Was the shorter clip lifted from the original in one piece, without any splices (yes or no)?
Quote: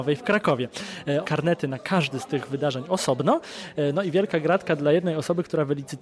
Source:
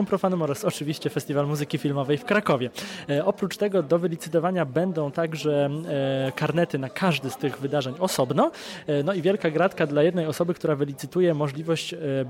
no